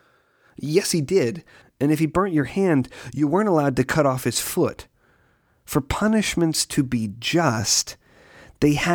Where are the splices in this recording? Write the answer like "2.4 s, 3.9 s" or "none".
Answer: 1.6 s